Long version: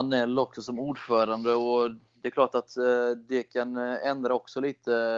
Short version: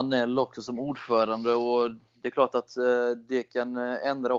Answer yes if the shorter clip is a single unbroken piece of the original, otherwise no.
yes